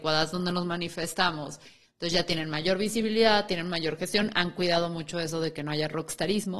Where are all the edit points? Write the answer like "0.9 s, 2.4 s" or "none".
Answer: 1.8 s